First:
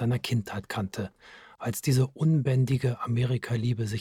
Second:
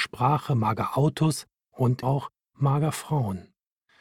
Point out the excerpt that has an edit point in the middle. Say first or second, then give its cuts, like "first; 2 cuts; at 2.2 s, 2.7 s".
second; 1 cut; at 2.0 s